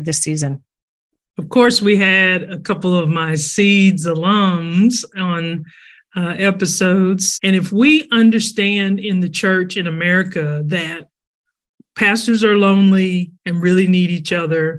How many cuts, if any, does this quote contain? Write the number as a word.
one